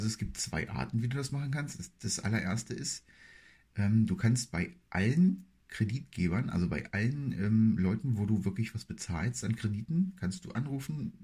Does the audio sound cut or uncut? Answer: uncut